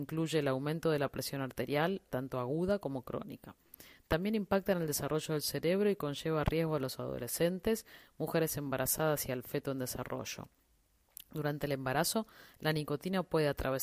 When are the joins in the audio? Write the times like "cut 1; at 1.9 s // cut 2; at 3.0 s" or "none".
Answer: cut 1; at 2.1 s

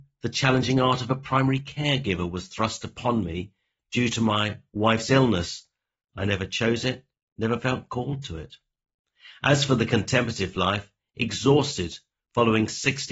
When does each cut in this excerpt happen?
none

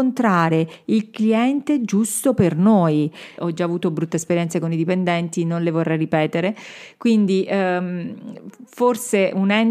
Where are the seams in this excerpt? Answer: cut 1; at 3.4 s

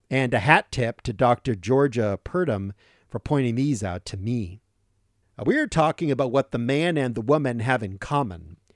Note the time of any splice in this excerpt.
cut 1; at 5.2 s

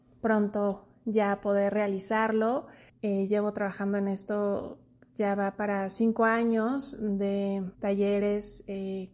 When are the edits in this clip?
cut 1; at 2.9 s // cut 2; at 7.7 s

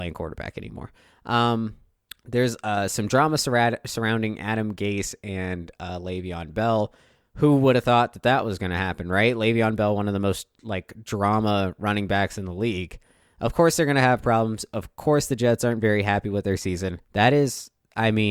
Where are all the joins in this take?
cut 1; at 17.0 s

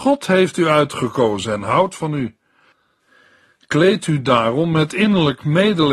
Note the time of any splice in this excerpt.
none

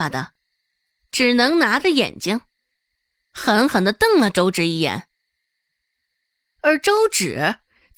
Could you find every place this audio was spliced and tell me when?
none

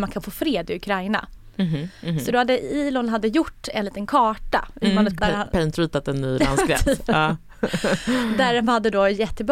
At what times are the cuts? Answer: cut 1; at 5.2 s

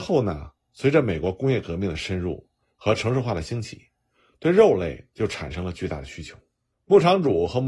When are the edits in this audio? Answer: cut 1; at 6.7 s

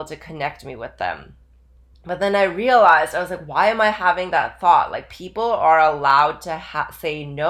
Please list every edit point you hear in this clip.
none

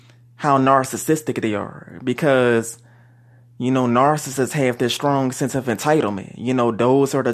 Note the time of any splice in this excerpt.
none

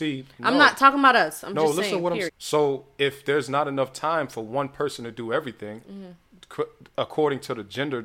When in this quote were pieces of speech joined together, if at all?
cut 1; at 2.3 s

